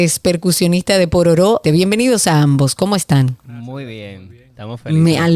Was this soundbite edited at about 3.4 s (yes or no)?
no